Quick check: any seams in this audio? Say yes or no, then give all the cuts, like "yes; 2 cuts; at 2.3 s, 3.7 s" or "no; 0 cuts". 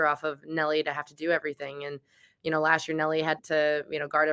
yes; 1 cut; at 3.4 s